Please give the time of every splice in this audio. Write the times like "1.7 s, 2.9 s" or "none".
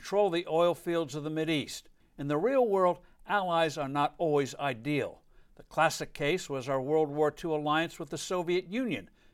2.0 s